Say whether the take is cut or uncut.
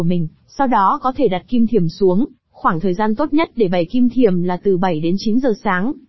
uncut